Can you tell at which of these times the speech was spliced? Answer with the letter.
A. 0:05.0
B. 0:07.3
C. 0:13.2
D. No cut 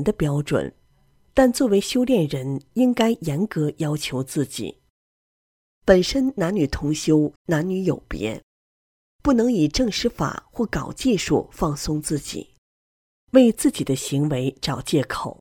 B